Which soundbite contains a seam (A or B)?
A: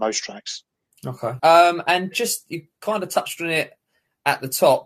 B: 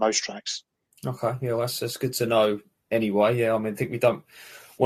A